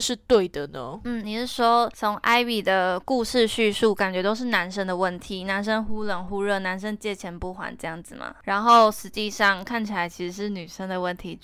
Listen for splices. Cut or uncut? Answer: uncut